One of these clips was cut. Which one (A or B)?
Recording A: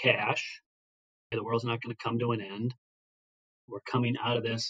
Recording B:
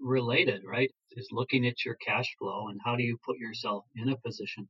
A